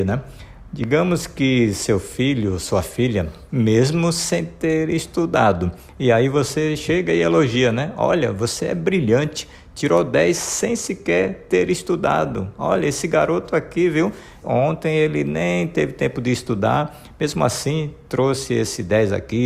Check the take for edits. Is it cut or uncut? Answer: cut